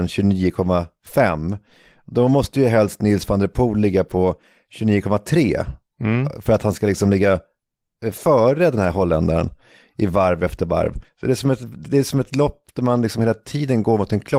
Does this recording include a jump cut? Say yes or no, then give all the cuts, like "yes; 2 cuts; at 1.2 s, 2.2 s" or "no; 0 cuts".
yes; 1 cut; at 11.0 s